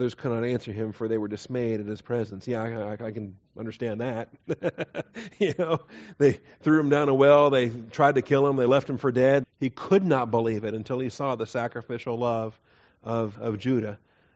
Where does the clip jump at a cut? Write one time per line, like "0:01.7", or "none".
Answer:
0:09.4
0:13.3